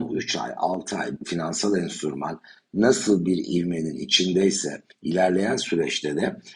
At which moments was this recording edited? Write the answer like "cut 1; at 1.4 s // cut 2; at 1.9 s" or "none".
cut 1; at 1.2 s

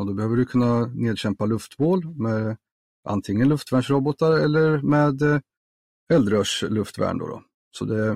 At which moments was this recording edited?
none

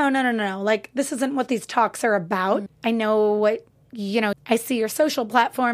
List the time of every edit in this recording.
cut 1; at 2.7 s // cut 2; at 4.3 s

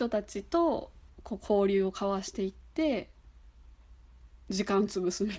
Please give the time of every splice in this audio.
none

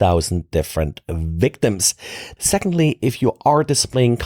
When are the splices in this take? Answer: cut 1; at 2.4 s

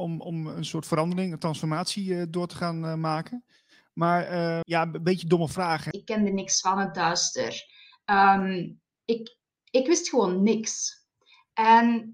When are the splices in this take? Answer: cut 1; at 4.6 s // cut 2; at 5.9 s

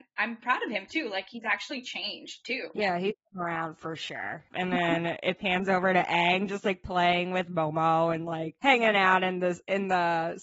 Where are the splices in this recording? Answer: cut 1; at 4.5 s

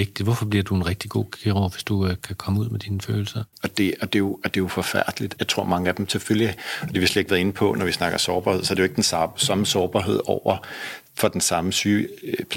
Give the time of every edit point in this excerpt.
cut 1; at 3.5 s // cut 2; at 5.4 s

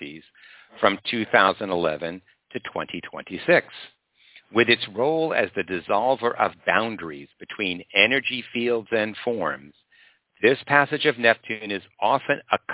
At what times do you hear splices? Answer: none

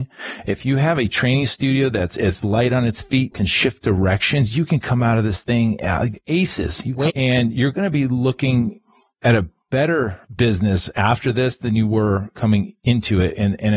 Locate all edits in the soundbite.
cut 1; at 3.3 s // cut 2; at 7.1 s // cut 3; at 10.2 s

